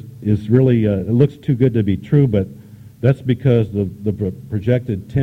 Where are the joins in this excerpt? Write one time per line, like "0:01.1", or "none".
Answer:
none